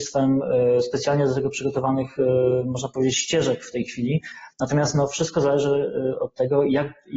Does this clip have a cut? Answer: no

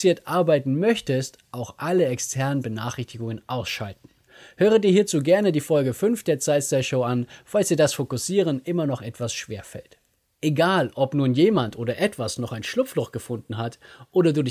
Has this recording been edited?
no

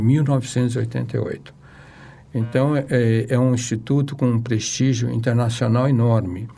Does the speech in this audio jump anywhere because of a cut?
no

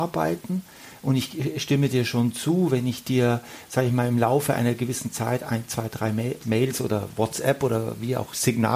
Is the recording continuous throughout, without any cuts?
yes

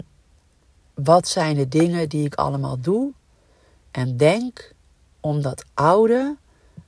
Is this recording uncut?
yes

